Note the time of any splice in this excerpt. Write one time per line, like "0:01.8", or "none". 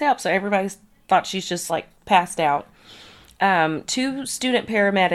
none